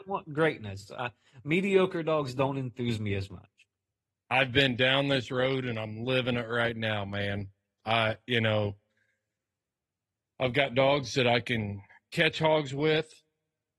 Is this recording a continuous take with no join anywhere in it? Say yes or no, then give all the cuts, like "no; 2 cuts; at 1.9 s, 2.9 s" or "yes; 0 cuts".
yes; 0 cuts